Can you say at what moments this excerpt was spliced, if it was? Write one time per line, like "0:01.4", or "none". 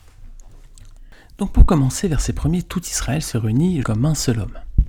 0:03.8